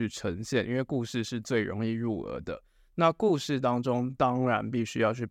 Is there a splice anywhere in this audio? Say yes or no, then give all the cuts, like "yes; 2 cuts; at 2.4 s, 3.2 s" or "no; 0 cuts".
no; 0 cuts